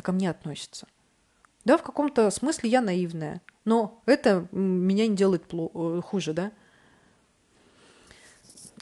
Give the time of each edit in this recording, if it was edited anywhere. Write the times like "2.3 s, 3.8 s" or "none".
1.4 s